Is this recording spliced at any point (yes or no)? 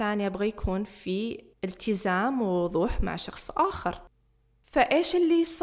no